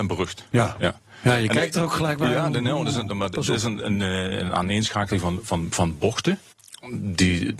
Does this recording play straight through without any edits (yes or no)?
yes